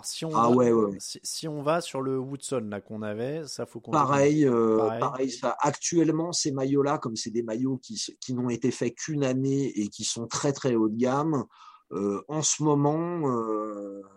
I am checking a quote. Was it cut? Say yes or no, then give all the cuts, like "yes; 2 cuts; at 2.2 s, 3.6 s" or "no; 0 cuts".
no; 0 cuts